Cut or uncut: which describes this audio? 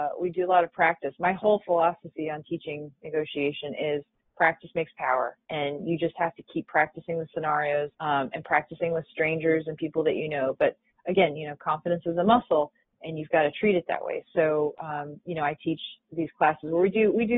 cut